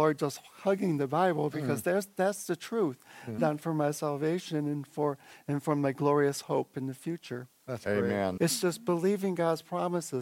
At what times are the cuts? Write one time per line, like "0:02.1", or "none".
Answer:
0:03.4
0:08.4